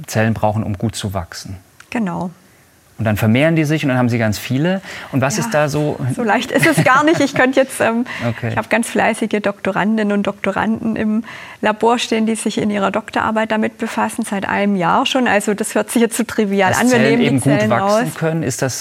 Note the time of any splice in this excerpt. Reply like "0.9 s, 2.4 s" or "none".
none